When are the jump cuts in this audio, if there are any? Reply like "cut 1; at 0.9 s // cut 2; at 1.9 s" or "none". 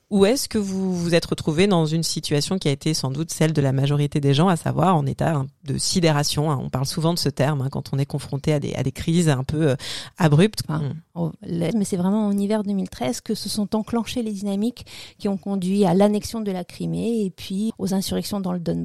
cut 1; at 10.6 s // cut 2; at 11.7 s // cut 3; at 17.7 s